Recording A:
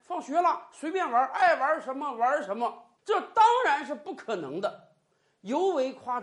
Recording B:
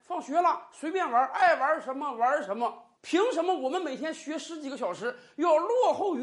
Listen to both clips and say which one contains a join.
A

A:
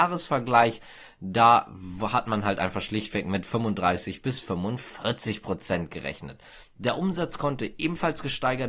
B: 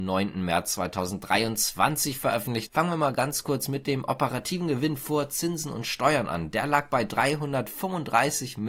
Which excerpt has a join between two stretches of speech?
B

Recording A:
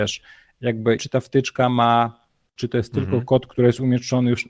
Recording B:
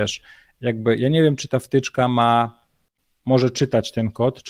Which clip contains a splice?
A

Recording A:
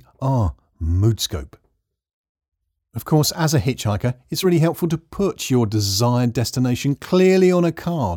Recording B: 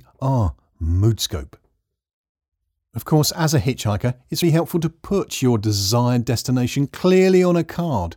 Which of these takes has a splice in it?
B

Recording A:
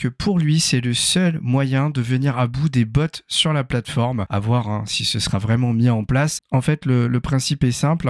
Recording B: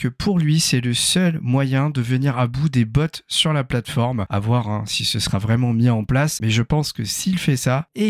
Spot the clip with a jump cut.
A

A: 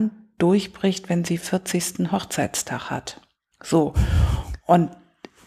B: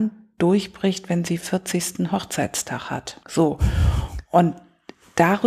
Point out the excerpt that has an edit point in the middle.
B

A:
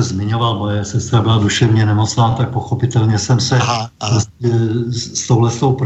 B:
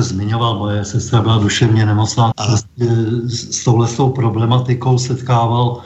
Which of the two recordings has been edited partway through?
B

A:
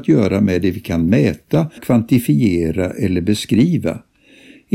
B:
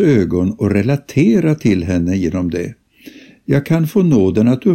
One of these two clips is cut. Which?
A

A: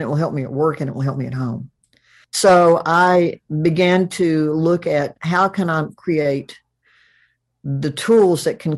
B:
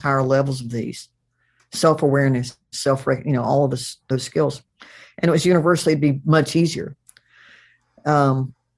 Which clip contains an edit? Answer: A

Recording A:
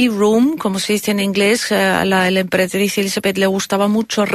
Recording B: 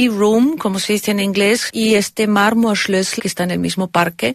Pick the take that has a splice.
B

